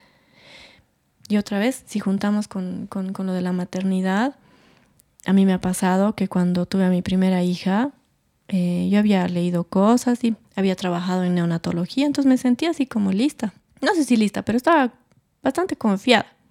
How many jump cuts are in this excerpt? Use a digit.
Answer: 1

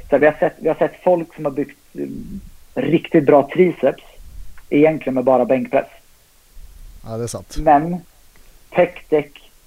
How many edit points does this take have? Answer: 1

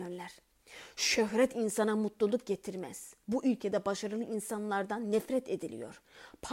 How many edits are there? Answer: 0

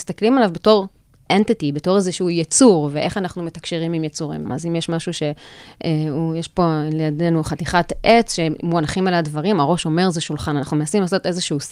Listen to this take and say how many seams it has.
1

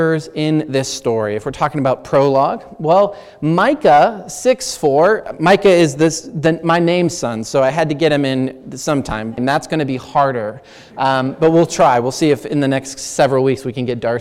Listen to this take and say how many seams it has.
1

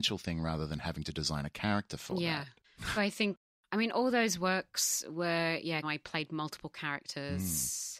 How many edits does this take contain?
2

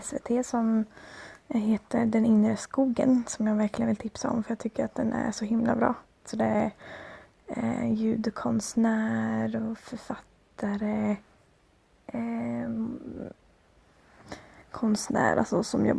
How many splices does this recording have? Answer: 1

